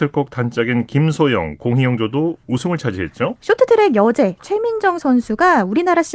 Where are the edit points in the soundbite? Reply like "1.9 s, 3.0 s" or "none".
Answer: 3.4 s